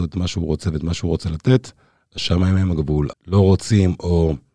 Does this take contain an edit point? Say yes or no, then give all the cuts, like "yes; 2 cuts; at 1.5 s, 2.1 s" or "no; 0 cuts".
yes; 1 cut; at 3.1 s